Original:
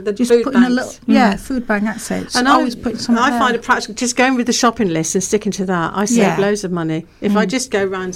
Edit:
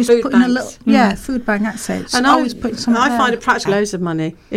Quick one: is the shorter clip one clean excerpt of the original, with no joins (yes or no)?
no